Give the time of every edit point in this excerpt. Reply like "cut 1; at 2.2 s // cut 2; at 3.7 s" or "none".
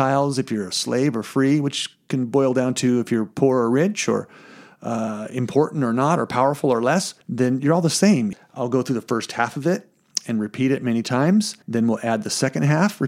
cut 1; at 7.2 s // cut 2; at 8.3 s // cut 3; at 11.6 s